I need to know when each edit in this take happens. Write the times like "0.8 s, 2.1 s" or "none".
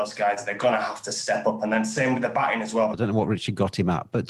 2.9 s